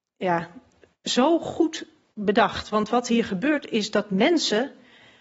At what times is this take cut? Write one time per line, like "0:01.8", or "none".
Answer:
none